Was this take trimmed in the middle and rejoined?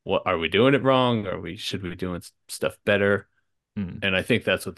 no; 0 cuts

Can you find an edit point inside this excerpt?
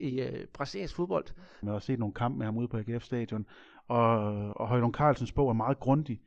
yes; 2 cuts; at 1.6 s, 4.5 s

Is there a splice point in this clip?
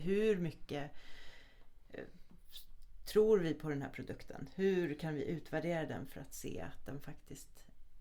no; 0 cuts

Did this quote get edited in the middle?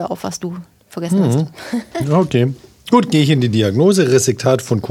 no; 0 cuts

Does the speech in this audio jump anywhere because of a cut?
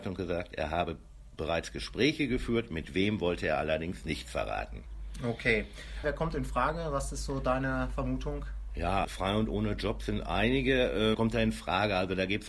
yes; 3 cuts; at 6.0 s, 9.0 s, 11.1 s

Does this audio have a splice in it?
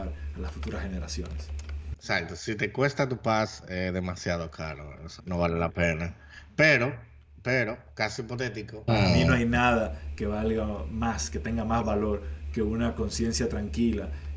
yes; 2 cuts; at 5.2 s, 8.9 s

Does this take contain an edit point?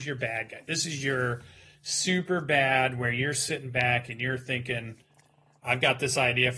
no; 0 cuts

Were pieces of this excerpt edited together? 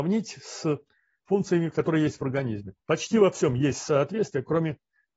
yes; 1 cut; at 2.8 s

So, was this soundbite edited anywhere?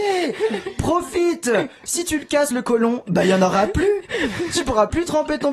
no; 0 cuts

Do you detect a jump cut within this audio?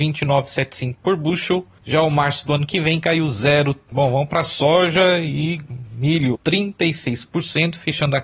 yes; 2 cuts; at 3.9 s, 6.3 s

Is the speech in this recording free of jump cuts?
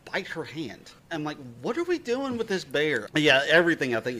no; 2 cuts; at 1.0 s, 3.1 s

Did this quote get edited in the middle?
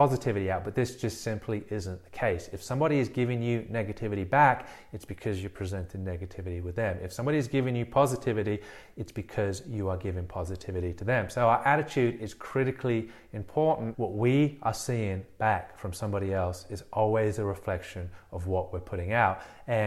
yes; 1 cut; at 13.9 s

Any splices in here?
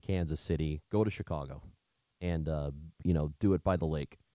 no; 0 cuts

